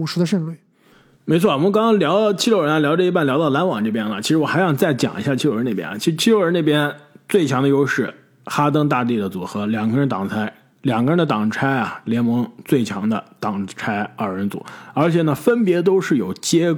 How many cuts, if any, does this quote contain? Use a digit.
0